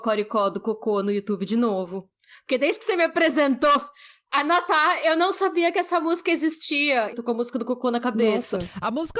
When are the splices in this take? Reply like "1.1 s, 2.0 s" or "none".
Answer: 7.1 s